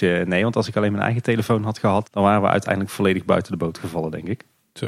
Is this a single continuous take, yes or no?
no